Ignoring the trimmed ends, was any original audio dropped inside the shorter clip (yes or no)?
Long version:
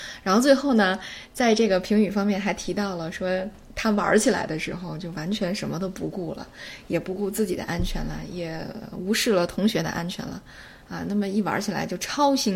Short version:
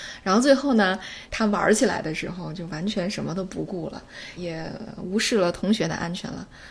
yes